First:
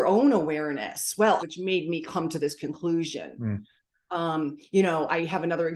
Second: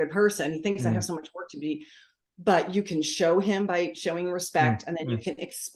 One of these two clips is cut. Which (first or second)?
first